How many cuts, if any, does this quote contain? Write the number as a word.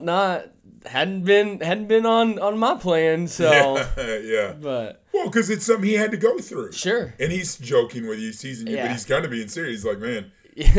zero